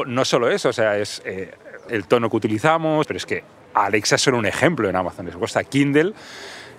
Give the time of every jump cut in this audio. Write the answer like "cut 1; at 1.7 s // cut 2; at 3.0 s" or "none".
cut 1; at 1.9 s // cut 2; at 3.0 s